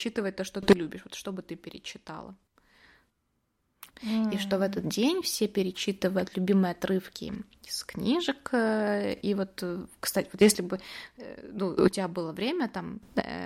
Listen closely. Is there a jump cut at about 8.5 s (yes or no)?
no